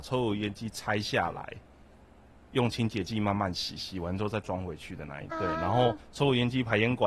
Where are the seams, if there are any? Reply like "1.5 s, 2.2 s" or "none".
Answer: 5.3 s